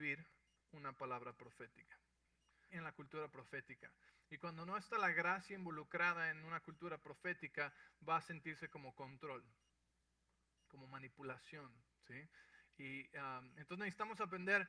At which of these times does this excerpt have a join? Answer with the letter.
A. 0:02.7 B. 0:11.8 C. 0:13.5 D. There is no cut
A